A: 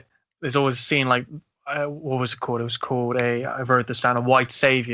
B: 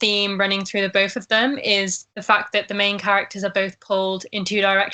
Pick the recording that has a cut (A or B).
B